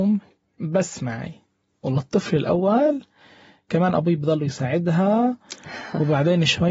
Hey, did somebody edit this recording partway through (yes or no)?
no